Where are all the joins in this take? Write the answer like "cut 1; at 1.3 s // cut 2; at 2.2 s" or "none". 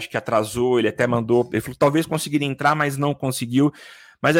none